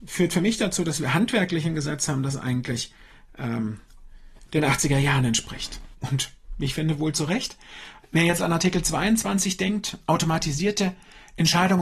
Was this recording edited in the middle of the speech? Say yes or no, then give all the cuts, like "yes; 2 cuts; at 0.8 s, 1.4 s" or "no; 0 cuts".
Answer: yes; 2 cuts; at 5.9 s, 8.0 s